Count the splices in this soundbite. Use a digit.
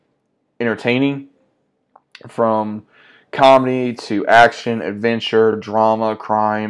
0